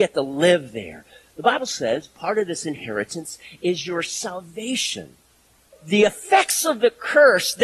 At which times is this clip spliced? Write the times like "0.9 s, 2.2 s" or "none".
1.2 s, 5.7 s